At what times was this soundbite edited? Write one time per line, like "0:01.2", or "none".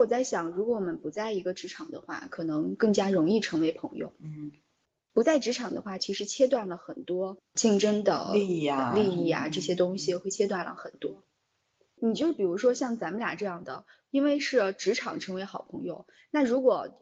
none